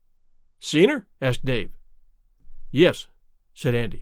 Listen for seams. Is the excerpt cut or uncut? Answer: cut